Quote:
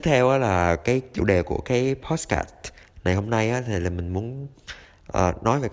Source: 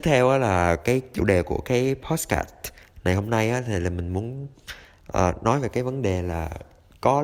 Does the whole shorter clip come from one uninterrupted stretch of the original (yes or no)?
yes